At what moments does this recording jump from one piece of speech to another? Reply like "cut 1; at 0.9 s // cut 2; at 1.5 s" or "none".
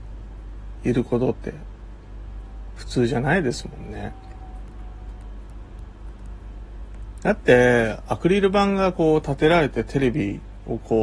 cut 1; at 7.2 s